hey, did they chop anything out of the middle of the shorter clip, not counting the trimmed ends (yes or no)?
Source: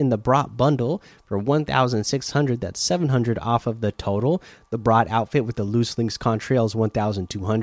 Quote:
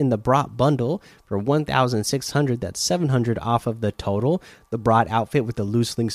no